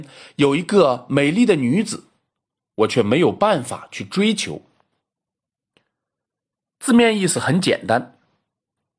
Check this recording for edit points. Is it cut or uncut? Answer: uncut